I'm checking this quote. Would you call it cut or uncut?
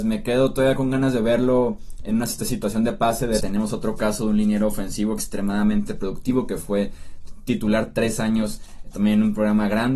cut